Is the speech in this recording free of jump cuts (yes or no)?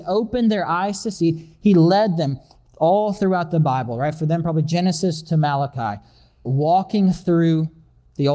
no